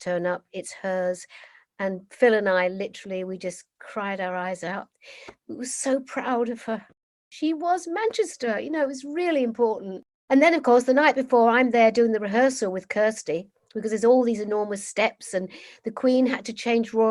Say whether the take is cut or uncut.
uncut